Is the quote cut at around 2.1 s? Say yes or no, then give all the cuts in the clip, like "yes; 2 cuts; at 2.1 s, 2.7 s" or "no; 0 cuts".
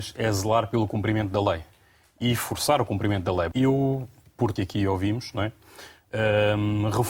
no; 2 cuts; at 3.5 s, 4.6 s